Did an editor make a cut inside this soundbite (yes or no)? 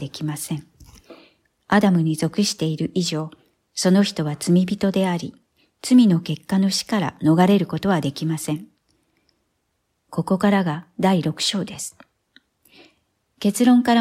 no